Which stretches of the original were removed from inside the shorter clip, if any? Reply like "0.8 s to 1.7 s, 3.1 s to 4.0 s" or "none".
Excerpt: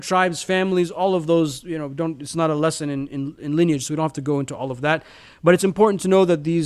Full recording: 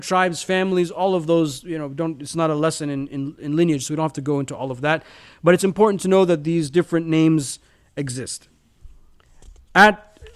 none